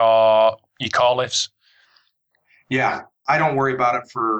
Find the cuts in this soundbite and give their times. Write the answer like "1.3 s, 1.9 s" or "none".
3.3 s